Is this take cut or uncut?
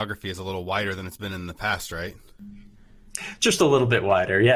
uncut